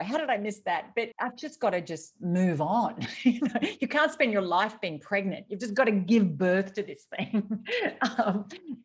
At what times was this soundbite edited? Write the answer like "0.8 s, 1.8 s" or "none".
1.1 s